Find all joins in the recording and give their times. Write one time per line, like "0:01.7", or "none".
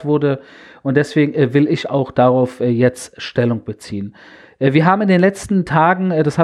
none